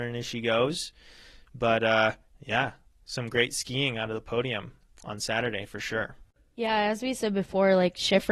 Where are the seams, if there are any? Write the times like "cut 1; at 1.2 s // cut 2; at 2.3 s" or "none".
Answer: none

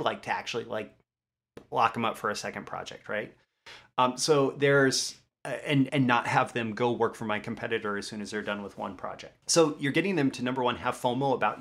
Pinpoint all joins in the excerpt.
cut 1; at 5.9 s // cut 2; at 9.4 s

